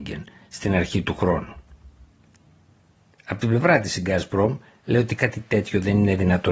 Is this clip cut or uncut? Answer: cut